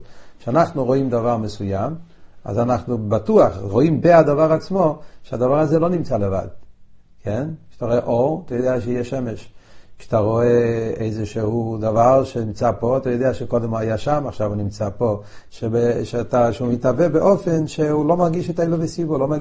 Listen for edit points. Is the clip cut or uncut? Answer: cut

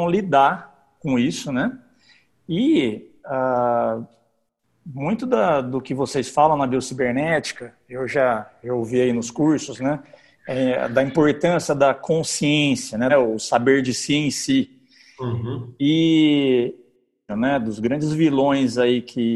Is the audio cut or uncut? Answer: cut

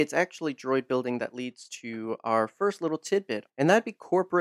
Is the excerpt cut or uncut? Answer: cut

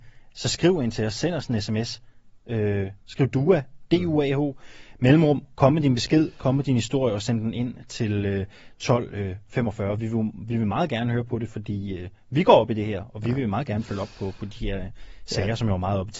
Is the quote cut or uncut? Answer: uncut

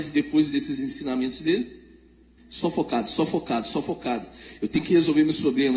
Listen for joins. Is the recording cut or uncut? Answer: cut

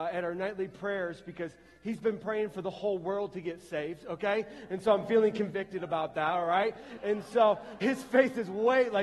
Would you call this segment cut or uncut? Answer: cut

